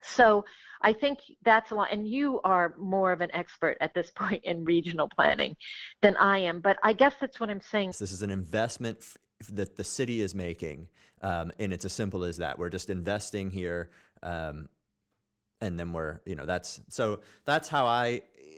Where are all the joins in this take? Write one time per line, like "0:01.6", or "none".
0:07.9